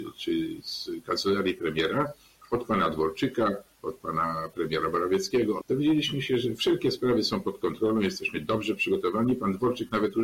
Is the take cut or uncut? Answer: cut